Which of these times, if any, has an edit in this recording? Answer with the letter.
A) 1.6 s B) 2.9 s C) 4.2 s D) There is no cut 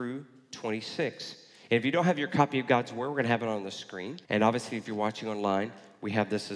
C